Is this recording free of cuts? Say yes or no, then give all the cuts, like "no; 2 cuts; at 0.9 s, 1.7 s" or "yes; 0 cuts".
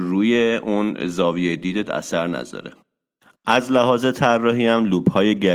yes; 0 cuts